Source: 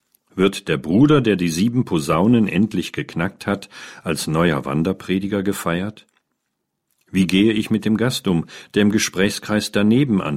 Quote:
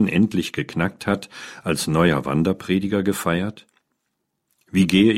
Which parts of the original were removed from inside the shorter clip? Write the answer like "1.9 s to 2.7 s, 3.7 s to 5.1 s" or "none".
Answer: none